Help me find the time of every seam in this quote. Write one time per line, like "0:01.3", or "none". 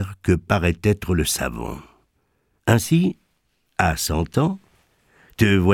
0:02.6